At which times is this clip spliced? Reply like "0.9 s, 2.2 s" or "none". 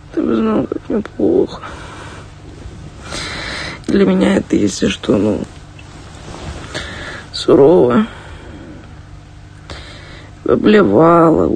3.8 s